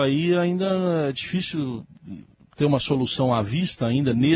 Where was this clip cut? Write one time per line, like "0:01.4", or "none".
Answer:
none